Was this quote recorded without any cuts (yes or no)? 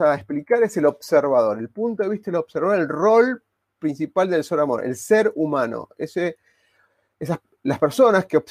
yes